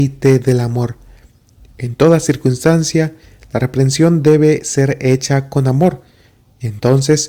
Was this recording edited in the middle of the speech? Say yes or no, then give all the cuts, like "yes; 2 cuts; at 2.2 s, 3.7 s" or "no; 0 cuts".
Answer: no; 0 cuts